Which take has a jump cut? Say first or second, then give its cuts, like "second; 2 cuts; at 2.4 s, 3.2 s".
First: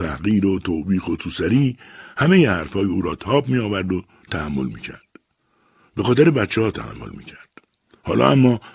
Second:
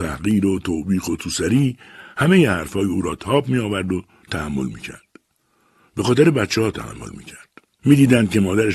second; 1 cut; at 7.8 s